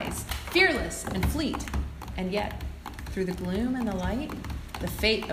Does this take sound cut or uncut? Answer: cut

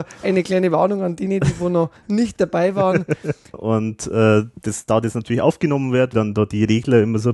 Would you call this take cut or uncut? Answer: cut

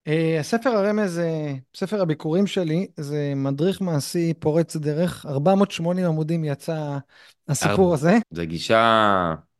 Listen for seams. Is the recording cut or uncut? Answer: cut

